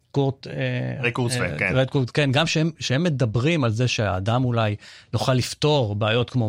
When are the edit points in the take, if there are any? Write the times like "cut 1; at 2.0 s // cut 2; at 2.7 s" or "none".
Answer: none